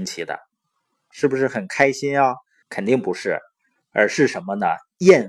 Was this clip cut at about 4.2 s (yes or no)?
no